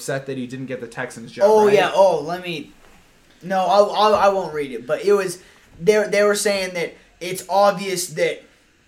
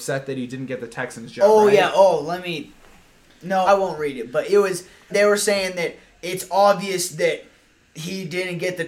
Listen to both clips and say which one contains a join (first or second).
second